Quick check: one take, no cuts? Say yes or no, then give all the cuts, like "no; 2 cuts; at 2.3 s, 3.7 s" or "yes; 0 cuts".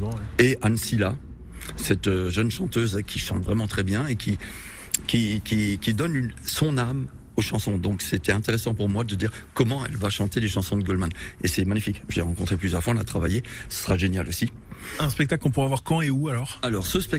yes; 0 cuts